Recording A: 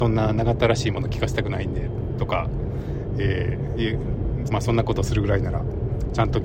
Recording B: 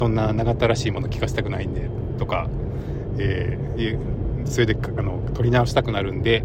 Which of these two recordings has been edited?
A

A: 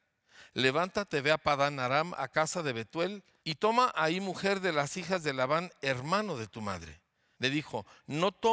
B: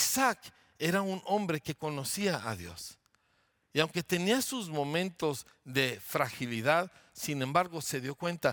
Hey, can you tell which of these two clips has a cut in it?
A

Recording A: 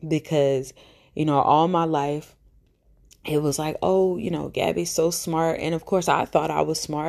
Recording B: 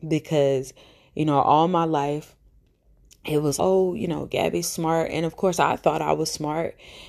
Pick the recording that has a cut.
B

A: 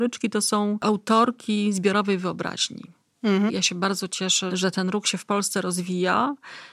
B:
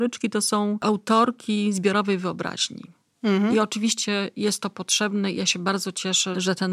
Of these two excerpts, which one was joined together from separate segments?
A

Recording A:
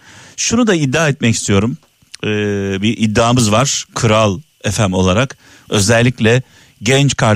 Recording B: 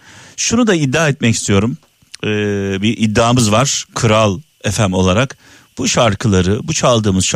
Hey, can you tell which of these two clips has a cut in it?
A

